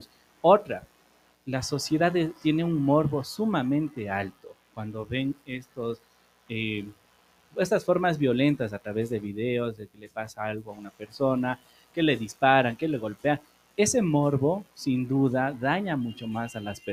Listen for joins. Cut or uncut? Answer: uncut